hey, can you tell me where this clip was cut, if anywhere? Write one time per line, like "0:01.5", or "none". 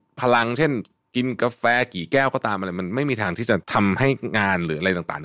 0:03.6